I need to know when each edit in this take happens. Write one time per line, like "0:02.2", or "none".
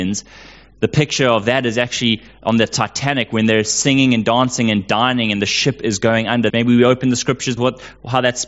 0:06.5
0:07.6